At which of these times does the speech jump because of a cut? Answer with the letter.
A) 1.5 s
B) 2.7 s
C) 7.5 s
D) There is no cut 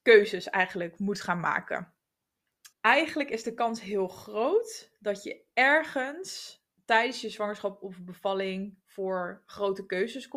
B